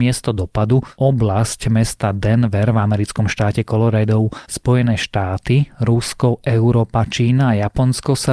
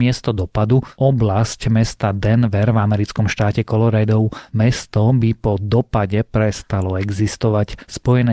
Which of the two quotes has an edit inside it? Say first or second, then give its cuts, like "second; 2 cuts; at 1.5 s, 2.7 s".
first; 1 cut; at 4.5 s